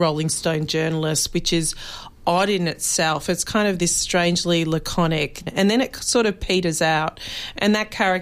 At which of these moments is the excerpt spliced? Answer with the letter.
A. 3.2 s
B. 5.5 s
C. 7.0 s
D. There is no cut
B